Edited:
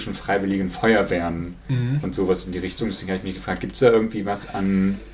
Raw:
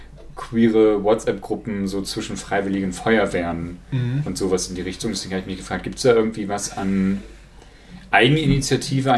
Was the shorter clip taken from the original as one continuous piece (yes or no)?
yes